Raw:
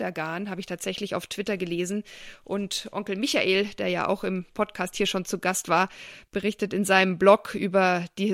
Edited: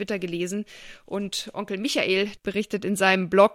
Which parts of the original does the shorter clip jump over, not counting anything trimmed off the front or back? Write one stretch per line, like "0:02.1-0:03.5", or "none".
0:03.8-0:06.3

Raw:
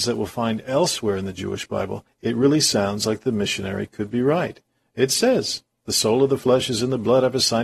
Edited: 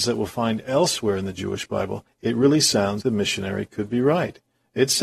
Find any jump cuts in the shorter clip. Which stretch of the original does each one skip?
0:03.0-0:03.2

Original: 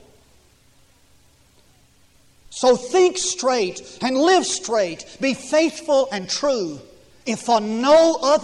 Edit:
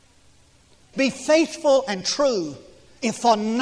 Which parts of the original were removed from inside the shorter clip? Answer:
0:01.8-0:05.2

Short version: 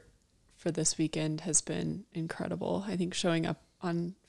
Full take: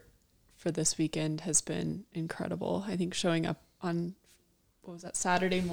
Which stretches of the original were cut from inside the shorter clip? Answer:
none

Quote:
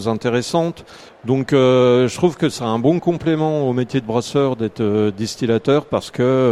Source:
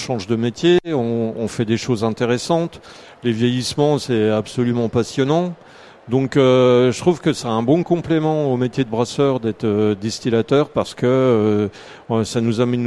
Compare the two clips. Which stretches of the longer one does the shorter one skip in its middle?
0:03.0-0:05.9

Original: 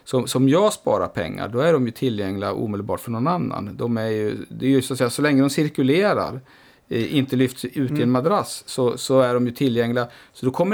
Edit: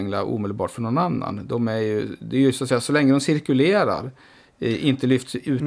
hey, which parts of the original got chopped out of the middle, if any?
none

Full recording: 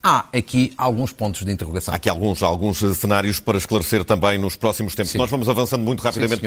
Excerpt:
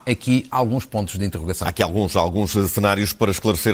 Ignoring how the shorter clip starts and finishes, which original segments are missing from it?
none

